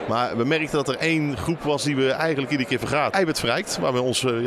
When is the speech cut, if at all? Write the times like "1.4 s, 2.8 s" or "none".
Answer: 3.1 s